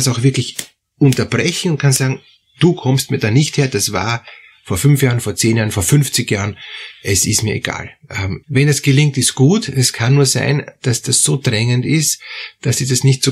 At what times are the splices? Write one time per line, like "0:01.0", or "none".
0:08.4

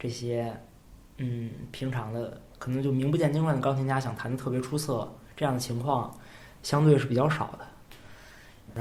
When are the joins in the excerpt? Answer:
0:01.1

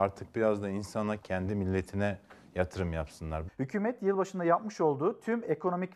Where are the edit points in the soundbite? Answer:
0:01.2
0:03.5

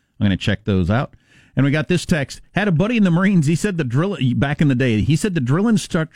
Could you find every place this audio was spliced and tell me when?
none

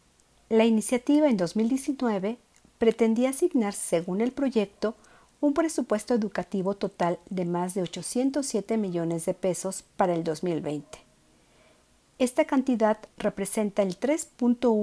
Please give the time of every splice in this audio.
none

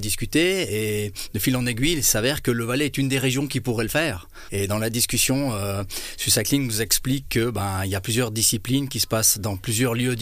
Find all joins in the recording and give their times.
0:04.5

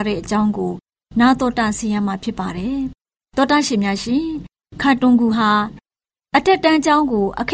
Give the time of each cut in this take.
none

